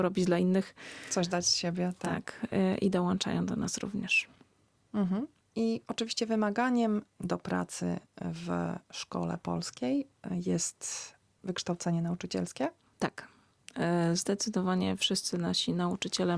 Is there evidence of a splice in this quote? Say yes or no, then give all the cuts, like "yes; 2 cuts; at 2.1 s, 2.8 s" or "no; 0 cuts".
no; 0 cuts